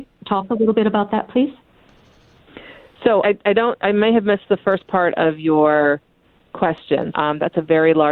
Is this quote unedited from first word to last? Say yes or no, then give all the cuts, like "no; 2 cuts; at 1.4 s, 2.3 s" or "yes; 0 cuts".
no; 2 cuts; at 3.2 s, 7.1 s